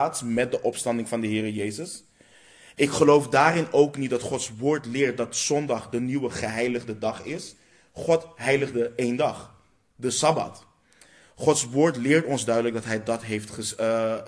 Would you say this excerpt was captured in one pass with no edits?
no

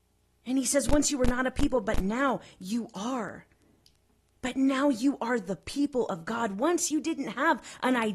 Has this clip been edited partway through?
no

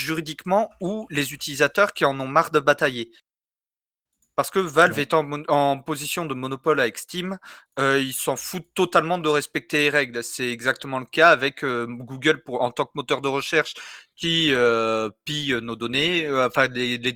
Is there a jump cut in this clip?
no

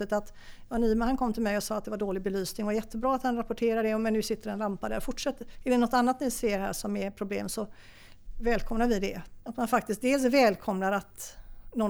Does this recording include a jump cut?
yes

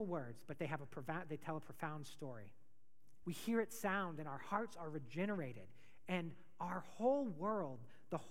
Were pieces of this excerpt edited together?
yes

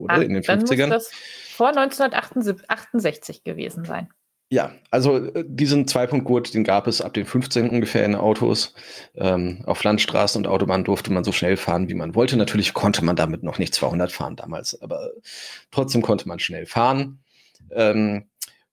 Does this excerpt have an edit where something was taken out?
no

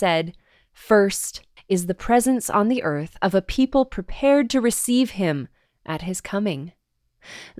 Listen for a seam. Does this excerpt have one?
yes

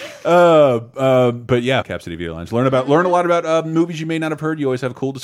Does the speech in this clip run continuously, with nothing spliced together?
no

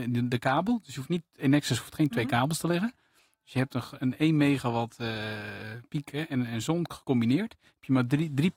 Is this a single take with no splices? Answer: yes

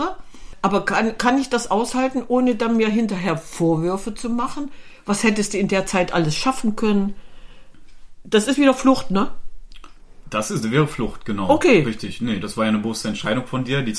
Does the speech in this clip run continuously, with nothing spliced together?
yes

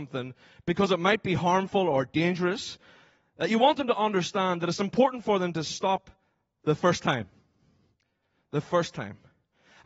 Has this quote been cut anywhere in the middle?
no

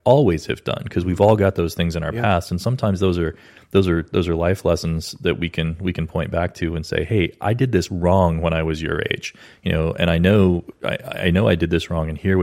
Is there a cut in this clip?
no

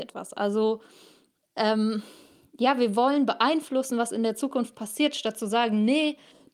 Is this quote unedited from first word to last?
yes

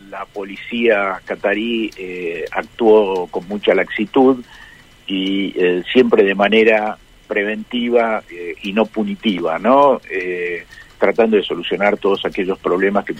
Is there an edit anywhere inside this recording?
no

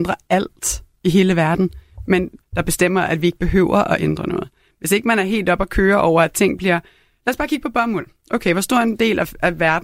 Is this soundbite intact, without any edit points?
no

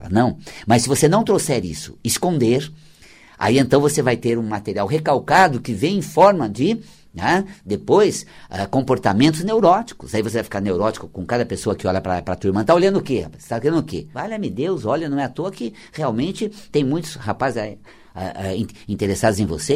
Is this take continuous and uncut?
no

